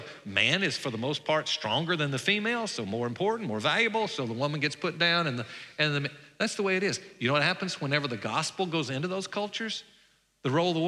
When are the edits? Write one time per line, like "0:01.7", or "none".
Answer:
none